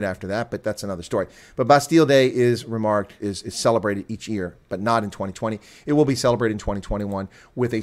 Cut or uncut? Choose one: cut